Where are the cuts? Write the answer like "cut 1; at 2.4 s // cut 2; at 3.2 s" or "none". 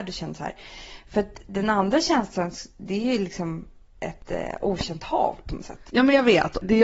cut 1; at 5.9 s